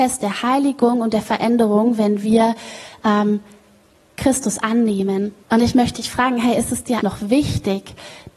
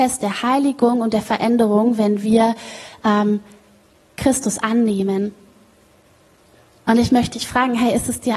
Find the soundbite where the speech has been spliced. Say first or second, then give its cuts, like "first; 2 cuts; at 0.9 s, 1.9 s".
first; 2 cuts; at 5.4 s, 7.0 s